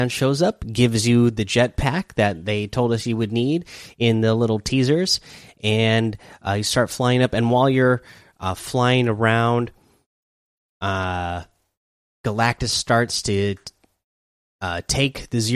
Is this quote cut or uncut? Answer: uncut